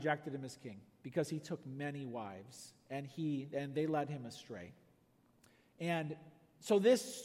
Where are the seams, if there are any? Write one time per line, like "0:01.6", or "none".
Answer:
none